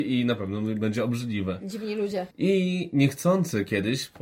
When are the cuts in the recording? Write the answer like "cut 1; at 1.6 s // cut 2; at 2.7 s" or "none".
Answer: cut 1; at 2.3 s